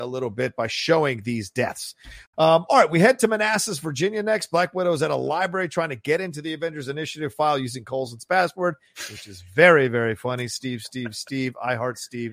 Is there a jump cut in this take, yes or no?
no